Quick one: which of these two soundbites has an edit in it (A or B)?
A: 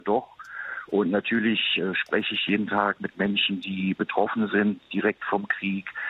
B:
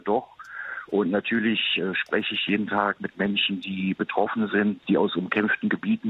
B